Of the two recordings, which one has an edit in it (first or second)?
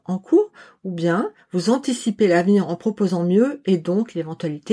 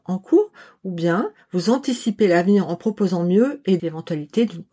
second